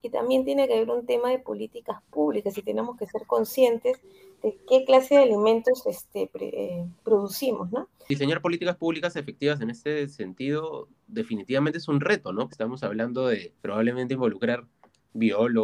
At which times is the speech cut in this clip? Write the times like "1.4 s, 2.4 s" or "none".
12.5 s, 13.6 s